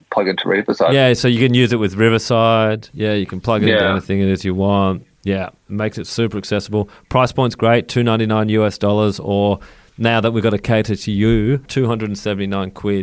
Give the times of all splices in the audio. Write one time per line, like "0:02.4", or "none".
none